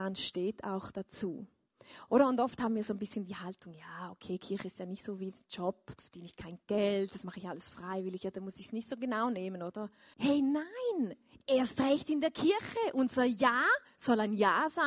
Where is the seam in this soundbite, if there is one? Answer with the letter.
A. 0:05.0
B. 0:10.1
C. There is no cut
B